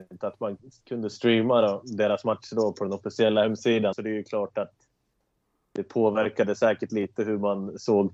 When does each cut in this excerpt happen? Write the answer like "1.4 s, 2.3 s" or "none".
3.9 s